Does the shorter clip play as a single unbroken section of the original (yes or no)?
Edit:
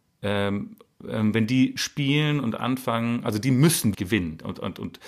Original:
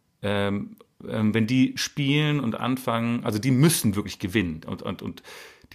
no